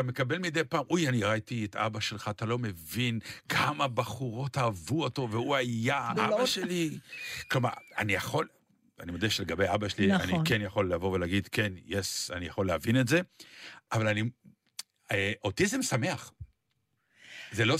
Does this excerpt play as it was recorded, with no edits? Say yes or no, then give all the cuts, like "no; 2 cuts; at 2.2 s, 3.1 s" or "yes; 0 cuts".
no; 1 cut; at 6.2 s